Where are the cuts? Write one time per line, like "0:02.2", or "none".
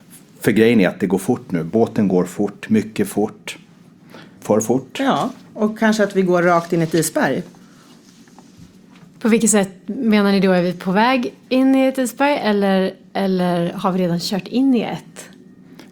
0:04.4